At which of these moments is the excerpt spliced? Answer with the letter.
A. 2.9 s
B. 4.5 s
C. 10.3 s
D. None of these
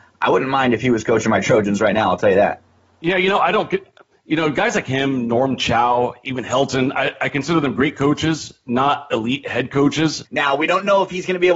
C